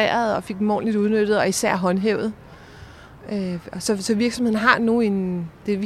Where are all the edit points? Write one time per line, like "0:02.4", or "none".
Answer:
none